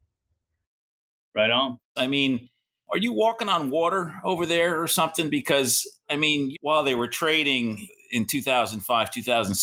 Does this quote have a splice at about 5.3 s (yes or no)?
no